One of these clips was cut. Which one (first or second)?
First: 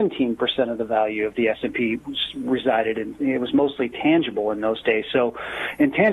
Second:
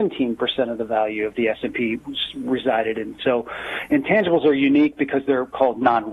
second